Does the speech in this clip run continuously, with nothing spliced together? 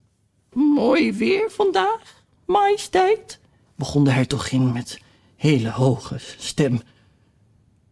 yes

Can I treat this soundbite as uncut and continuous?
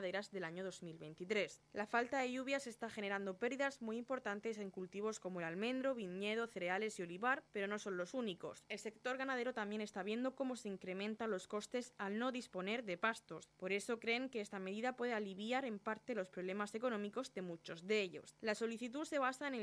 yes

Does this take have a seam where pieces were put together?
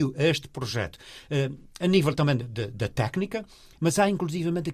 yes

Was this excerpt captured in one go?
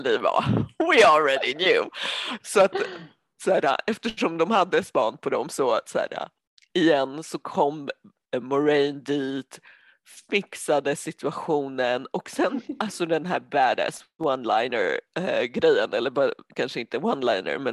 yes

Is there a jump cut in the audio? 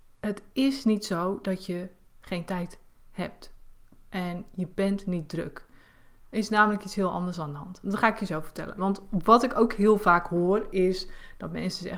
yes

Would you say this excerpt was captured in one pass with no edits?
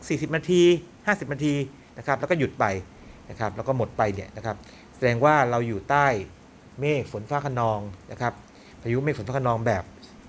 yes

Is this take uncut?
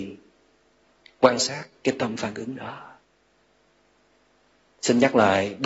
yes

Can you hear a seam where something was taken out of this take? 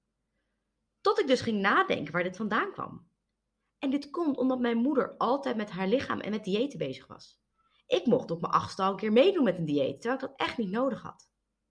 no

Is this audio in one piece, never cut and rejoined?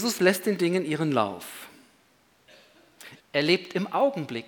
no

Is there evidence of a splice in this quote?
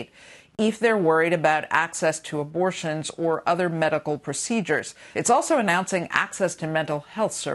yes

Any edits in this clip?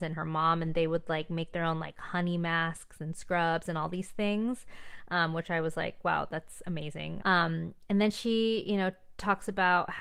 yes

